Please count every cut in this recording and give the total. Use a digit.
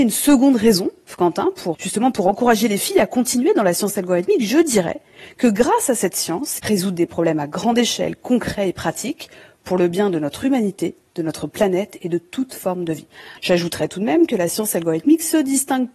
3